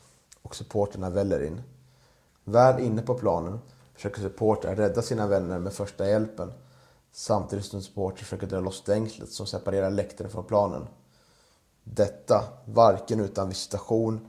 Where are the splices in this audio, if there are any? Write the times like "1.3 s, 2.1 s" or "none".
2.3 s, 11.7 s

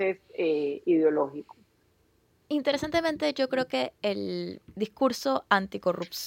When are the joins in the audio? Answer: 2.4 s, 4.7 s

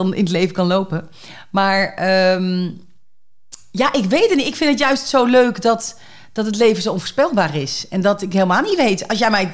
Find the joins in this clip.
none

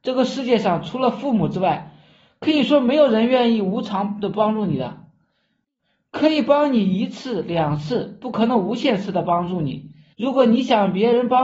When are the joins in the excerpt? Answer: 10.1 s

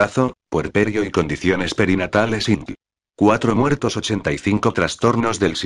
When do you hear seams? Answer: 3.0 s

